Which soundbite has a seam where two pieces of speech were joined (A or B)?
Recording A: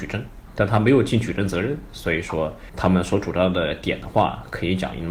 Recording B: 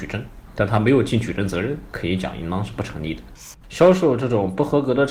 B